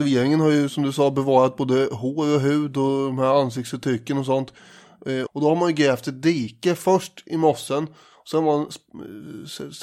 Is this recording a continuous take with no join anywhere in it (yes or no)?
no